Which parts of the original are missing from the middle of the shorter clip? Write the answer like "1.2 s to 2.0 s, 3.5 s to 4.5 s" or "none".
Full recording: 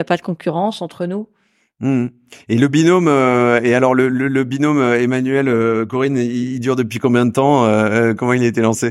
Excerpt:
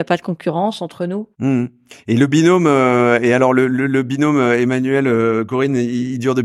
1.3 s to 1.7 s